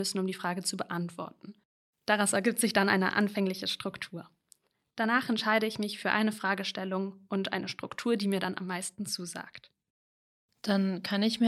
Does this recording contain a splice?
no; 0 cuts

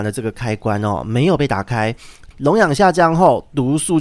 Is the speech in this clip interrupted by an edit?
yes; 1 cut; at 2.3 s

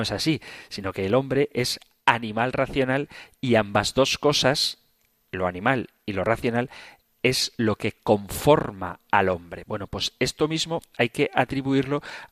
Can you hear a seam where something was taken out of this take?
no; 0 cuts

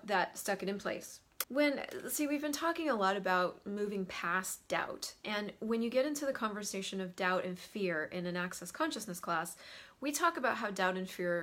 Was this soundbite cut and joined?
yes; 1 cut; at 1.4 s

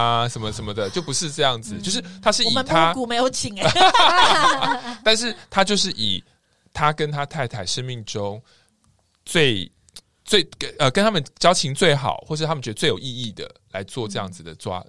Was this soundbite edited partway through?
no; 0 cuts

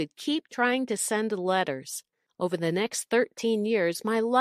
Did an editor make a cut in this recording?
yes; 1 cut; at 2.3 s

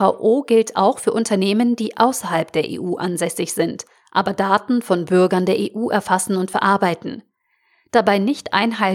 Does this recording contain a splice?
no; 0 cuts

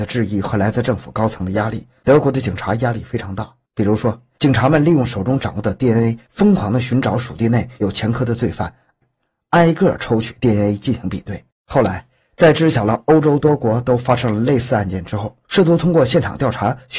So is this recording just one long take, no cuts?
no; 3 cuts; at 3.7 s, 11.5 s, 15.4 s

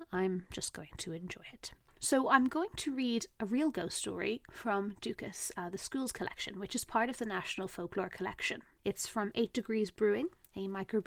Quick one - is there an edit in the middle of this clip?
yes; 1 cut; at 8.8 s

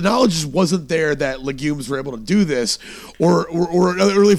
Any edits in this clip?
no; 0 cuts

